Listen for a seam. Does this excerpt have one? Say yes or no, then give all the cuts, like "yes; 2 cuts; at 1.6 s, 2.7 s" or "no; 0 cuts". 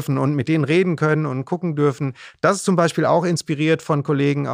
no; 0 cuts